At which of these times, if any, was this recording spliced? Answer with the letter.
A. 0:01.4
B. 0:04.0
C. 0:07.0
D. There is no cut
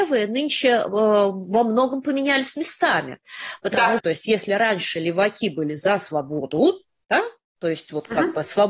B